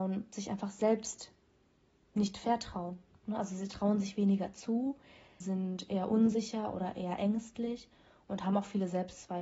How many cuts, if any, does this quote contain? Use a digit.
1